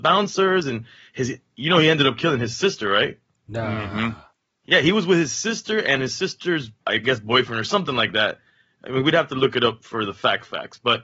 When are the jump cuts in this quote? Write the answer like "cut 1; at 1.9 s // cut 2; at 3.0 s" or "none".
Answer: cut 1; at 6.8 s